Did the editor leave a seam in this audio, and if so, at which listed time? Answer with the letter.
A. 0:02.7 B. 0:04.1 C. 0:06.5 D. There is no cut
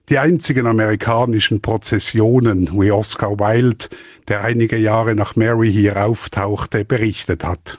D